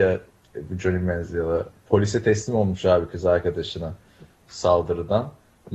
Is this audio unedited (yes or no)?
yes